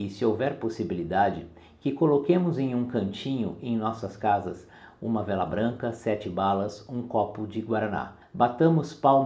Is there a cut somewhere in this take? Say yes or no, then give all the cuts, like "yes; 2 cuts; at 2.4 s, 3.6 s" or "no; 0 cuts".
yes; 1 cut; at 8.2 s